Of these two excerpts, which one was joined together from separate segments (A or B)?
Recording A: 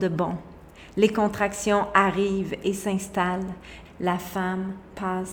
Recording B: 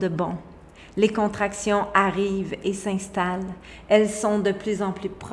A